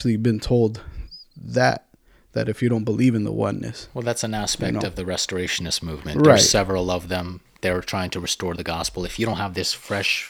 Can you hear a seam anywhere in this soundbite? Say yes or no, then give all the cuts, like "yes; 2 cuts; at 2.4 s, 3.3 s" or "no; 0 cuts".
no; 0 cuts